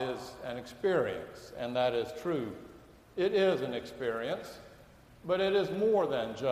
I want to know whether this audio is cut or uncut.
uncut